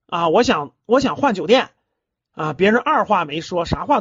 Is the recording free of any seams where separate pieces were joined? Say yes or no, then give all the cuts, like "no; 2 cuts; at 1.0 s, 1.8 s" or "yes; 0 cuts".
yes; 0 cuts